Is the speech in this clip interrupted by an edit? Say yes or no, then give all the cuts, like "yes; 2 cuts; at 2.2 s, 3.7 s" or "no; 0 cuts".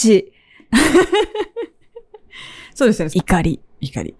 yes; 1 cut; at 3.1 s